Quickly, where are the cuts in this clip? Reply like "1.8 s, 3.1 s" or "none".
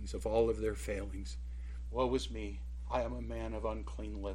1.9 s